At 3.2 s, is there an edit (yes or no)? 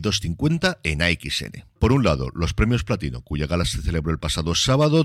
no